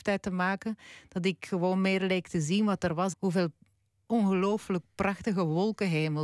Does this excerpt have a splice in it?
yes; 1 cut; at 3.1 s

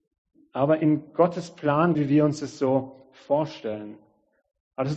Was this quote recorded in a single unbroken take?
no; 1 cut; at 1.9 s

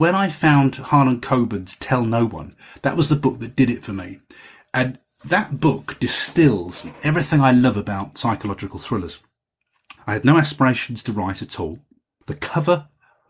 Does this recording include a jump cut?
yes; 2 cuts; at 10.0 s, 12.2 s

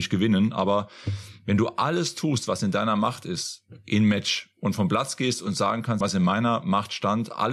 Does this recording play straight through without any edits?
no; 1 cut; at 6.0 s

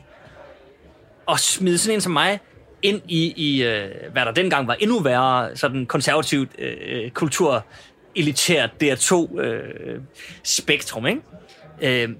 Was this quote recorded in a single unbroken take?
no; 1 cut; at 1.2 s

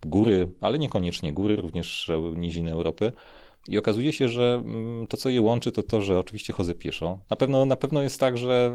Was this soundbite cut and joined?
yes; 2 cuts; at 1.6 s, 7.2 s

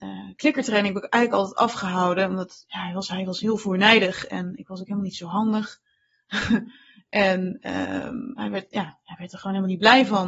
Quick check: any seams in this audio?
yes; 1 cut; at 4.6 s

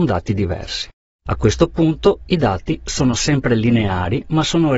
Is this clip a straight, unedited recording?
no; 1 cut; at 1.2 s

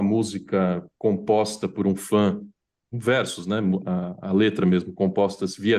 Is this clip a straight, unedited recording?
yes; 0 cuts

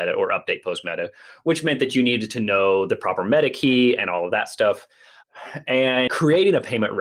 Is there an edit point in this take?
yes; 1 cut; at 6.1 s

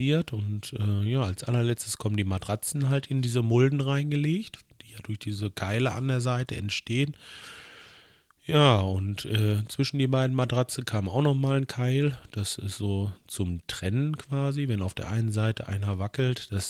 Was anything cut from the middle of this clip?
no; 0 cuts

